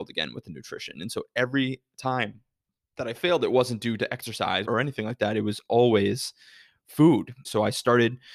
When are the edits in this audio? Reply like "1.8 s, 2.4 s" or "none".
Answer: 4.7 s, 7.4 s